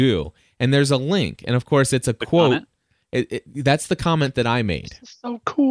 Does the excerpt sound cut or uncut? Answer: uncut